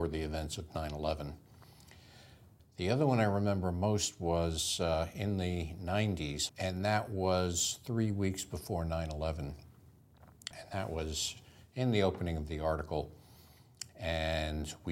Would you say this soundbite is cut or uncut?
cut